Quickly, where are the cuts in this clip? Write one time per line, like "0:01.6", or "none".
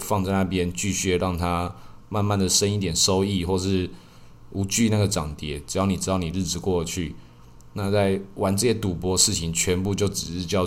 none